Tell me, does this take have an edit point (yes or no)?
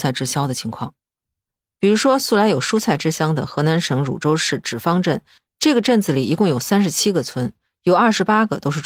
no